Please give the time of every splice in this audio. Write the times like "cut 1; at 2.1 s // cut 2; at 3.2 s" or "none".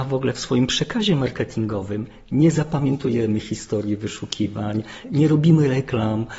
cut 1; at 5.0 s

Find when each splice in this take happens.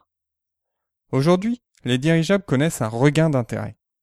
cut 1; at 1.0 s

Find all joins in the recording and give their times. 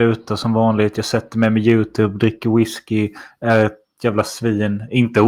none

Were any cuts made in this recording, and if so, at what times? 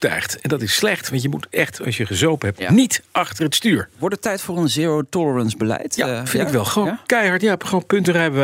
none

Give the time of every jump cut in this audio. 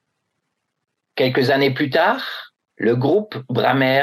cut 1; at 2.7 s

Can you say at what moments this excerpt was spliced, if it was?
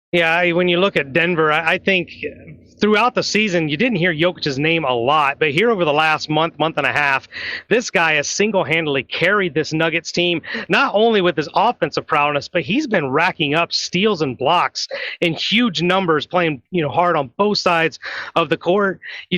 none

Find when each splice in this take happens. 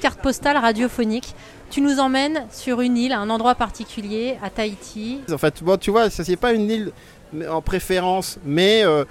cut 1; at 5.3 s

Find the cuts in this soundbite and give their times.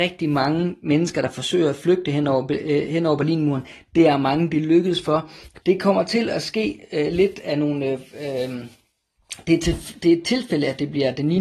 cut 1; at 5.6 s

